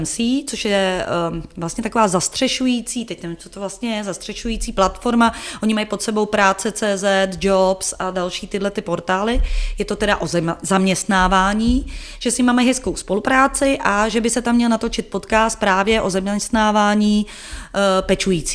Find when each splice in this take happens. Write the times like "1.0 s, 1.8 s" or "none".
none